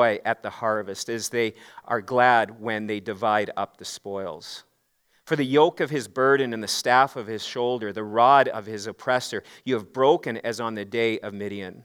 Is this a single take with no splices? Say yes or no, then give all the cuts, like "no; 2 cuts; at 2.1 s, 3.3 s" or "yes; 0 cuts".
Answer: yes; 0 cuts